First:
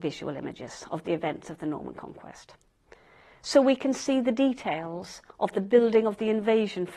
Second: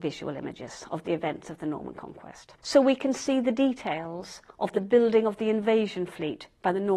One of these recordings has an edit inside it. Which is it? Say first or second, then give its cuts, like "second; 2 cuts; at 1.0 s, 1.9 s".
second; 1 cut; at 2.6 s